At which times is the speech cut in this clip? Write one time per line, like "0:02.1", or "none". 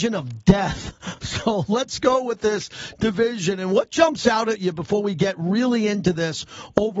none